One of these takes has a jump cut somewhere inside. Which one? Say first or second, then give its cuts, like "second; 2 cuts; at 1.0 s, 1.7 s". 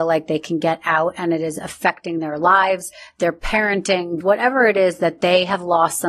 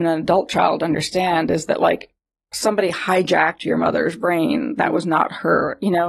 first; 1 cut; at 4.2 s